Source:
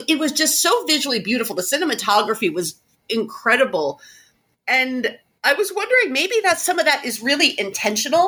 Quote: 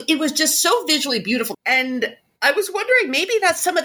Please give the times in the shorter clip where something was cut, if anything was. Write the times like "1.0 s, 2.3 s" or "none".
1.5 s